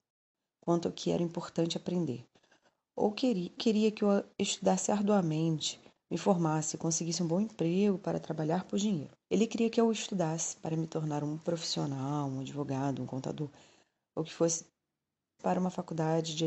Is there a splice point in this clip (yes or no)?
yes